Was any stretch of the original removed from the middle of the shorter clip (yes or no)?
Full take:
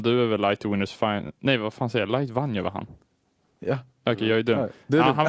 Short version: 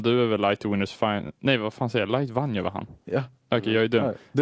yes